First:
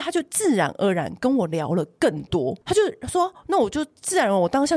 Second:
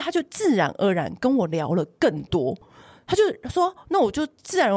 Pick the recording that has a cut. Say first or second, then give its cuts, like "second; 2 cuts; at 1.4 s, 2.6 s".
first; 1 cut; at 2.6 s